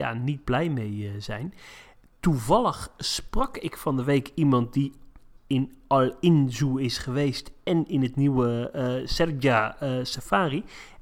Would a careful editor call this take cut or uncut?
uncut